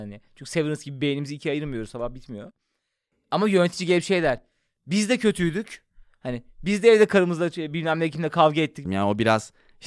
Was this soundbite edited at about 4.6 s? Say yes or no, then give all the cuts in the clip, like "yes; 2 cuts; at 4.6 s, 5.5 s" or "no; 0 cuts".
no; 1 cut; at 8.9 s